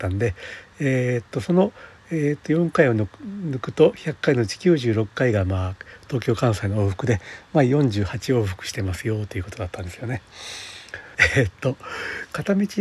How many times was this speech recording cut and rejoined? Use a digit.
1